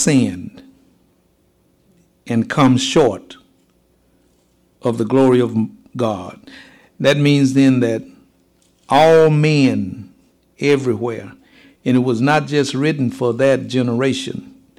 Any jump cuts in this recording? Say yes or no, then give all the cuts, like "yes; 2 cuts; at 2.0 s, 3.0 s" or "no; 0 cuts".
no; 0 cuts